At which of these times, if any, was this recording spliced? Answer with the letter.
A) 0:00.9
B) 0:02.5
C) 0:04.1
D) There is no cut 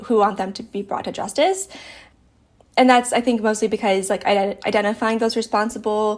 D